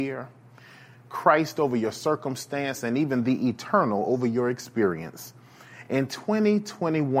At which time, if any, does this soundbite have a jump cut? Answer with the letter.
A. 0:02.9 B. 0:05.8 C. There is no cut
C